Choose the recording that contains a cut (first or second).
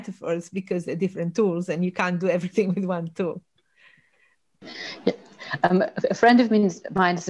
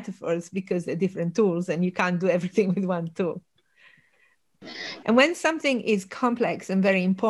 second